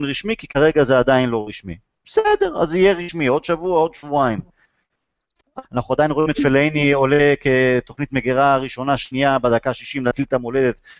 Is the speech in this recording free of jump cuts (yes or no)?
no